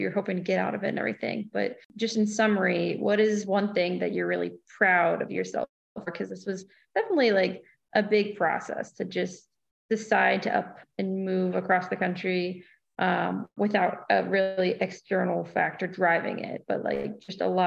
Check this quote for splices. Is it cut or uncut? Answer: uncut